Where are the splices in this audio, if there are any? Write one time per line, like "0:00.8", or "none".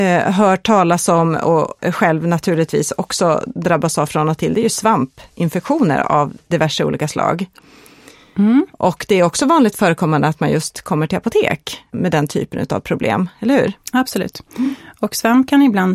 0:11.9